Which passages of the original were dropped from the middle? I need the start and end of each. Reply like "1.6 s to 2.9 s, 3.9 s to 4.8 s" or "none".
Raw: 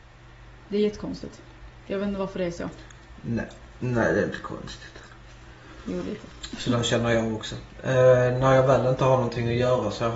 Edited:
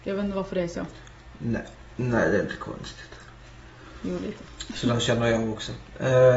none